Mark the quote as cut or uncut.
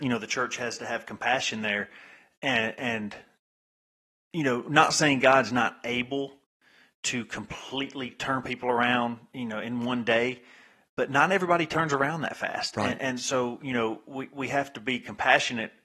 uncut